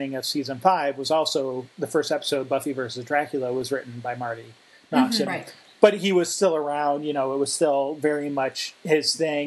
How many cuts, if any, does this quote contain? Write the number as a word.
one